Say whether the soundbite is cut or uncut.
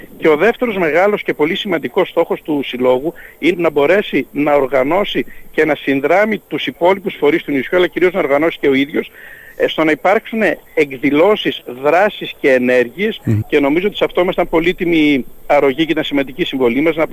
cut